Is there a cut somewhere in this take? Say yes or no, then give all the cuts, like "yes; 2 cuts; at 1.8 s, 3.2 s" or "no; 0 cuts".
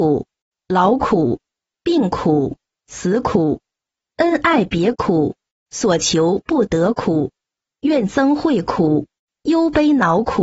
no; 0 cuts